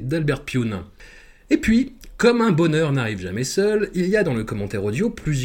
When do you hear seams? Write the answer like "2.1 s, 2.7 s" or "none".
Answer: none